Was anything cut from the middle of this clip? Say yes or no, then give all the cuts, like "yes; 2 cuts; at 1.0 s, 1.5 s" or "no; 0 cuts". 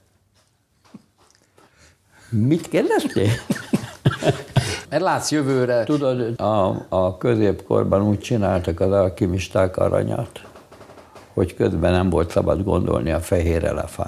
yes; 2 cuts; at 4.8 s, 6.4 s